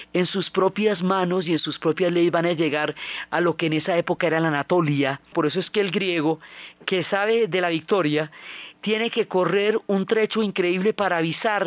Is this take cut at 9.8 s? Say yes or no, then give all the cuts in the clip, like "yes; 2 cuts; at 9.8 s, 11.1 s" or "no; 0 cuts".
no; 1 cut; at 5.3 s